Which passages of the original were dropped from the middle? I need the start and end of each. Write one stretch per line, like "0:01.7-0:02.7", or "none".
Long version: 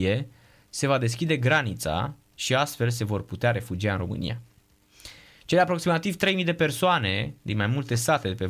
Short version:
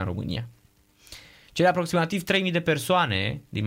none